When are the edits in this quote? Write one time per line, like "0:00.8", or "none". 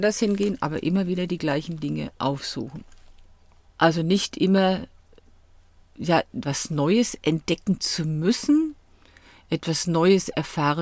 0:03.7